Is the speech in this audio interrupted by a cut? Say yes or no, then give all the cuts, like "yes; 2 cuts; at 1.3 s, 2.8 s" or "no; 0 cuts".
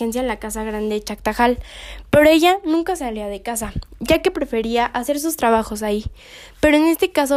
no; 0 cuts